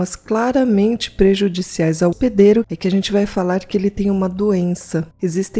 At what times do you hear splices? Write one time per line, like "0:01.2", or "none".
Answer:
0:02.1

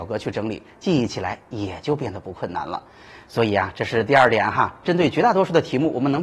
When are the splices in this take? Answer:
none

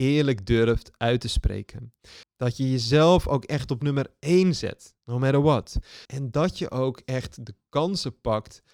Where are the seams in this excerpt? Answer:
0:02.2
0:06.1

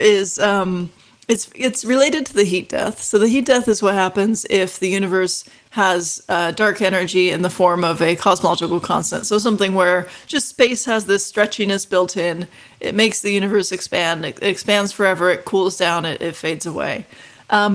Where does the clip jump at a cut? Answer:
none

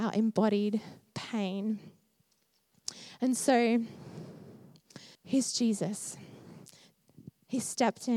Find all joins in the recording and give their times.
0:05.1

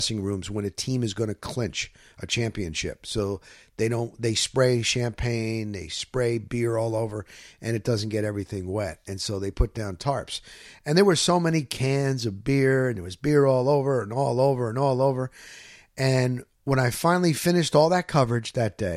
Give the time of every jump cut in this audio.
none

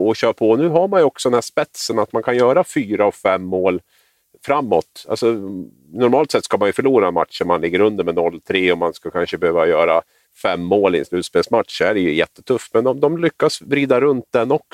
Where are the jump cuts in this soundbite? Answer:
none

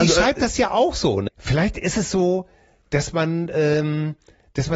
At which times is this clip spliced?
0:01.3

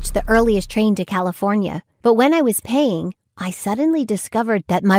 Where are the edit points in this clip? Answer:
none

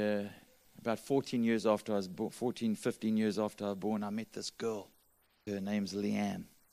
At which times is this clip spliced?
0:05.5

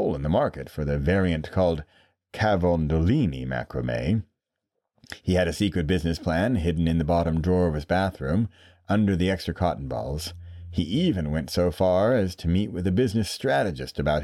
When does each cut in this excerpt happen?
none

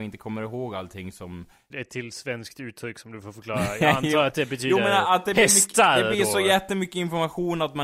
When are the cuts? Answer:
0:01.7

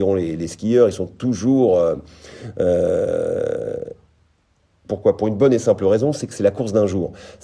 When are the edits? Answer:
0:04.9

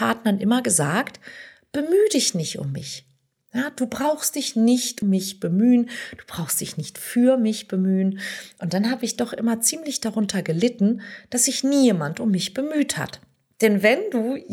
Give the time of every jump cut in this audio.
0:05.0

